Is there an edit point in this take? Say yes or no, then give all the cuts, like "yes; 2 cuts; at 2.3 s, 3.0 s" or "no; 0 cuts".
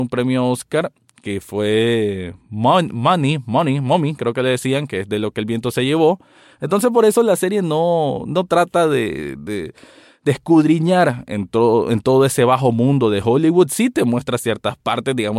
yes; 1 cut; at 6.5 s